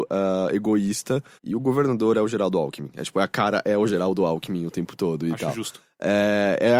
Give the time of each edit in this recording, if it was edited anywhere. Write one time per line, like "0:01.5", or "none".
0:01.4